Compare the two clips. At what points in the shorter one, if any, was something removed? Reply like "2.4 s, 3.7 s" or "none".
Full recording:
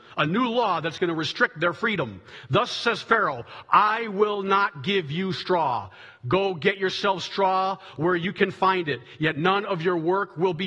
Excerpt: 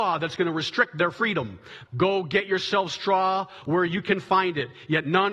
1.9 s